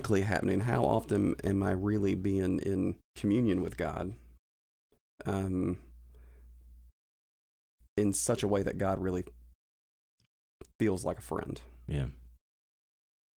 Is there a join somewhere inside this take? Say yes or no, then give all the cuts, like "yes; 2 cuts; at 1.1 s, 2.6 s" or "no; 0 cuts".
yes; 1 cut; at 3.0 s